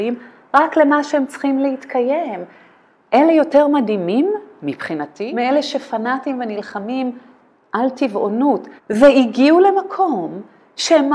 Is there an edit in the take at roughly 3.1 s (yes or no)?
no